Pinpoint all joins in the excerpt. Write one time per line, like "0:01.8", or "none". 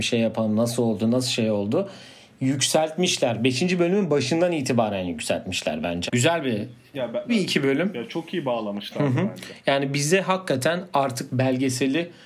0:06.1
0:07.3